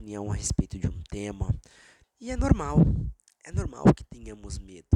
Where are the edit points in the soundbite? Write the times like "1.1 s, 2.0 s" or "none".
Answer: 2.0 s